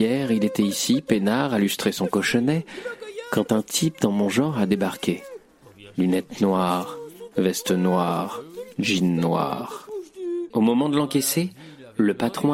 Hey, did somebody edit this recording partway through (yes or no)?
yes